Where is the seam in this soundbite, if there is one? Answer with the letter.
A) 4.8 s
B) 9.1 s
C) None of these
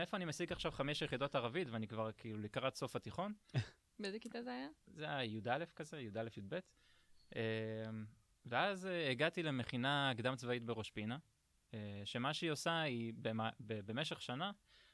C